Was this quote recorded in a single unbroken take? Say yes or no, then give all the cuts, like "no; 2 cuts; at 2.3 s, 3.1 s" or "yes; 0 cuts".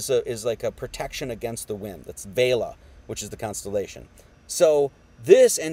no; 2 cuts; at 2.0 s, 4.3 s